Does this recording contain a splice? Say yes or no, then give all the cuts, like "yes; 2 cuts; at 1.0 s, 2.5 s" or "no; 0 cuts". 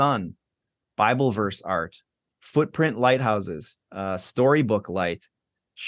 yes; 1 cut; at 3.8 s